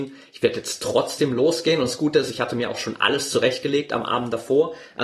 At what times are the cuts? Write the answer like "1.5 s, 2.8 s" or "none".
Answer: none